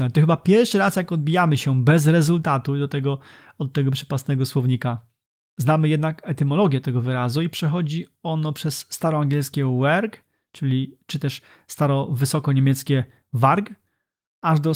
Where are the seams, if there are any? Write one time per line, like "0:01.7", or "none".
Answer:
none